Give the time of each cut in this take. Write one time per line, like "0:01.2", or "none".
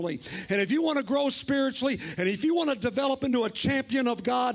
none